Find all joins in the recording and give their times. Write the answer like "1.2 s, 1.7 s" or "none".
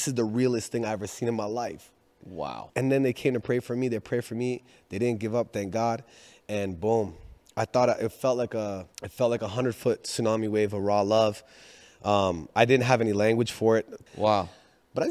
2.7 s, 8.9 s, 14.1 s